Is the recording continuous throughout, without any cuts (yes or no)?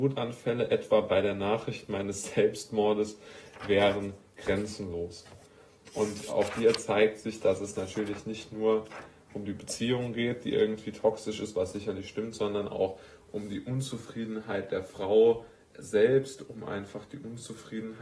yes